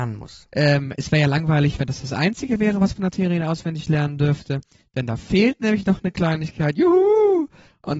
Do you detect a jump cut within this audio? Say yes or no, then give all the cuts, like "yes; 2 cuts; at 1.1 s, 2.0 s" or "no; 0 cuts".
no; 0 cuts